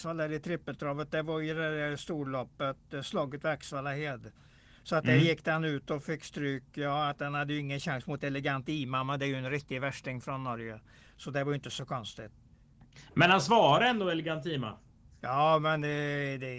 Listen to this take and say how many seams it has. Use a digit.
0